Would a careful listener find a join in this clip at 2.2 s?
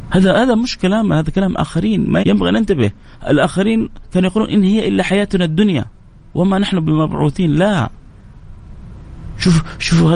yes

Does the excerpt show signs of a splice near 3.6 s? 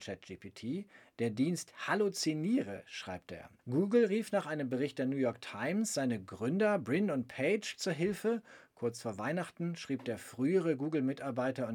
yes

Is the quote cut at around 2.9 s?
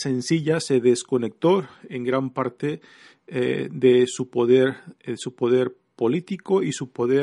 no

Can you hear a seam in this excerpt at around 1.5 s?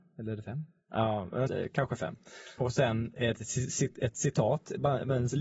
yes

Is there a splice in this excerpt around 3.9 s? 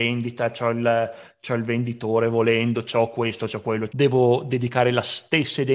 yes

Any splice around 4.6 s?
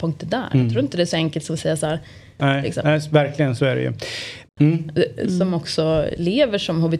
yes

